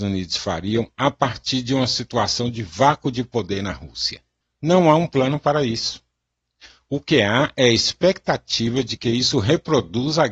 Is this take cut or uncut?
uncut